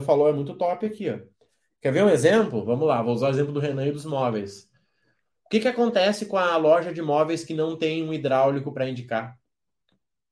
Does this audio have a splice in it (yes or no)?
no